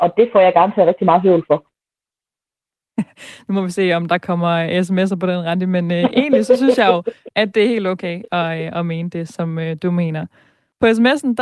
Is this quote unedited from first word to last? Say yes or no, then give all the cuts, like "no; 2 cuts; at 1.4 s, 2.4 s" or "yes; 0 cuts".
yes; 0 cuts